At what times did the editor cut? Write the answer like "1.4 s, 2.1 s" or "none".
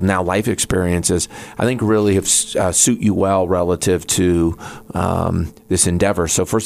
none